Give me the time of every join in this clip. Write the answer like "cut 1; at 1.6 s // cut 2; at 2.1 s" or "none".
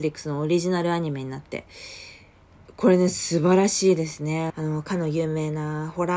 cut 1; at 4.5 s